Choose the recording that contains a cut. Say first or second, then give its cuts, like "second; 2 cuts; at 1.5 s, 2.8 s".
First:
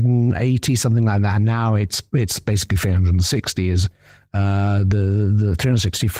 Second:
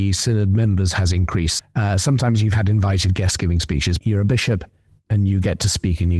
second; 2 cuts; at 1.6 s, 4.0 s